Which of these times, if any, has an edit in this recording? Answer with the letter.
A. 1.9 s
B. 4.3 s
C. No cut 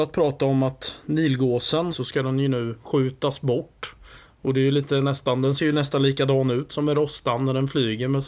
A